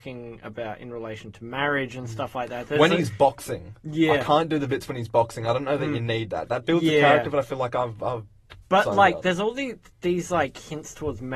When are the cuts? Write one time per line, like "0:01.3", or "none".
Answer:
none